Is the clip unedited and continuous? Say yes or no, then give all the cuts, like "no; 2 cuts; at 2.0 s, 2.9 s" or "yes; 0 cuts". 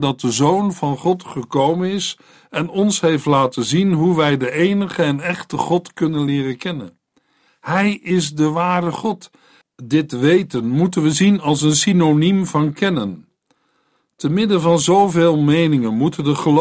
no; 2 cuts; at 7.5 s, 9.6 s